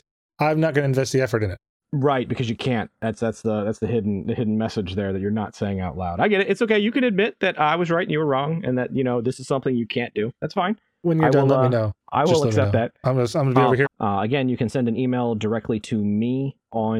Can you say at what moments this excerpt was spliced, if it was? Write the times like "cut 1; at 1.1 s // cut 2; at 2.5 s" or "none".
cut 1; at 13.9 s